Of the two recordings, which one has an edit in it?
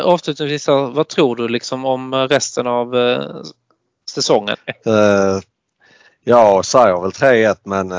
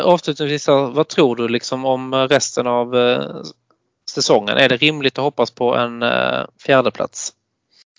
first; 1 cut; at 4.5 s

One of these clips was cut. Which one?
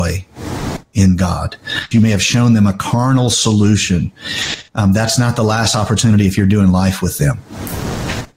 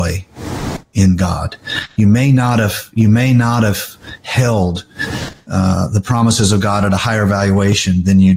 first; 2 cuts; at 1.9 s, 4.7 s

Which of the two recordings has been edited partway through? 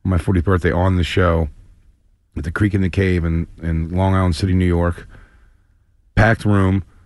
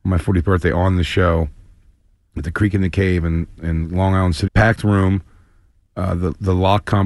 second; 1 cut; at 4.5 s

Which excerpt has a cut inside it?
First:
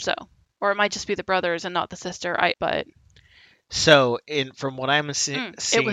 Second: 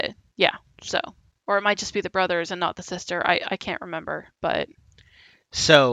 first; 1 cut; at 2.5 s

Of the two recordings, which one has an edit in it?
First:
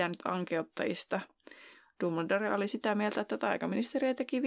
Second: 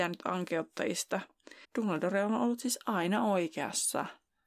second; 1 cut; at 1.6 s

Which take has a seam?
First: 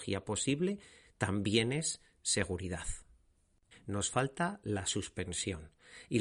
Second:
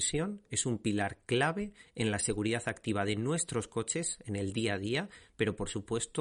first; 1 cut; at 3.7 s

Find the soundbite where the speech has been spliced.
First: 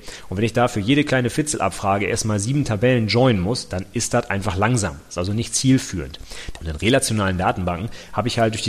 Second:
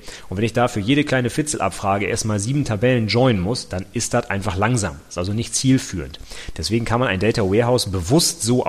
first; 1 cut; at 6.5 s

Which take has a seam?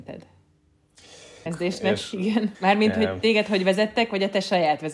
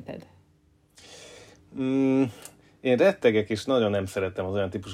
first; 2 cuts; at 1.5 s, 2.5 s

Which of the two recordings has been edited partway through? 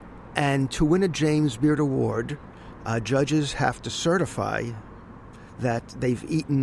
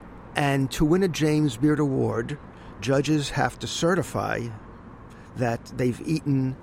second; 1 cut; at 2.8 s

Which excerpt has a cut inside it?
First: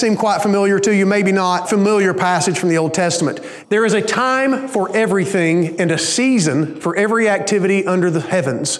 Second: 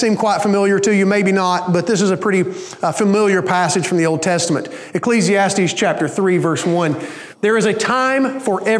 first; 2 cuts; at 1.6 s, 3.6 s

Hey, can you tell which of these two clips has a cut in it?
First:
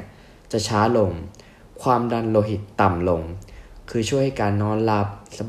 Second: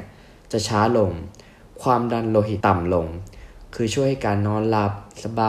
second; 1 cut; at 2.6 s

